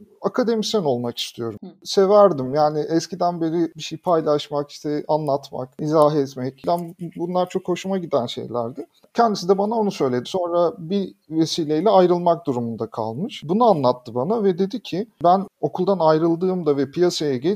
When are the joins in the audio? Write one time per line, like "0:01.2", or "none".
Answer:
0:09.1
0:10.2